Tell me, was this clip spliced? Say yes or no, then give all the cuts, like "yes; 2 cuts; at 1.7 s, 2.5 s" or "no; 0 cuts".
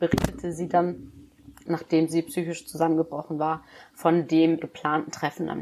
yes; 2 cuts; at 1.7 s, 4.6 s